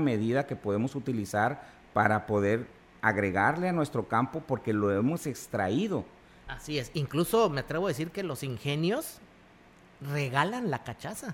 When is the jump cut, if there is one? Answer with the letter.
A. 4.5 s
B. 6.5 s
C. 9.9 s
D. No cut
B